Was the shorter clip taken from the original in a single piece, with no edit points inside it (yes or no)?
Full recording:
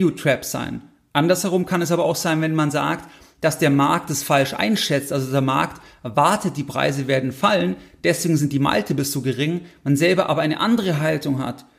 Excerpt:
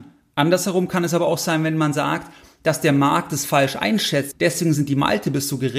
no